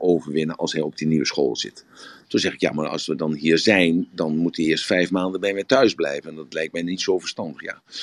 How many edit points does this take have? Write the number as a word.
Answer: one